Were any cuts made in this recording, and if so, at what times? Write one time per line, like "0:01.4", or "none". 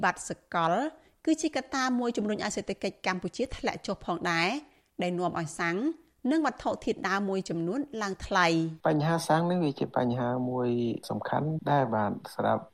0:08.8